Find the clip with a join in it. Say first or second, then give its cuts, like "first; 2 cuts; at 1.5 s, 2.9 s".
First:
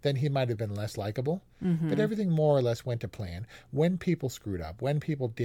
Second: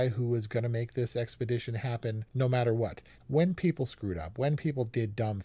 second; 1 cut; at 3.2 s